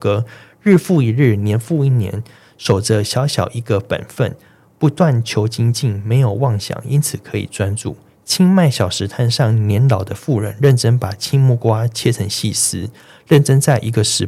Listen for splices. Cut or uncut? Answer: uncut